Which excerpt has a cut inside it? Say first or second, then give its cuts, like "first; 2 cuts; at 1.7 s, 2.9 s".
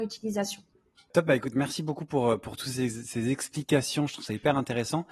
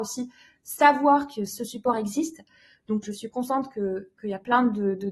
second; 1 cut; at 3.0 s